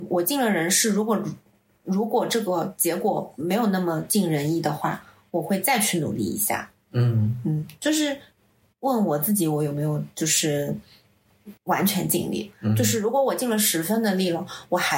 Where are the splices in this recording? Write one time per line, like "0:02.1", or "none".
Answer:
0:11.6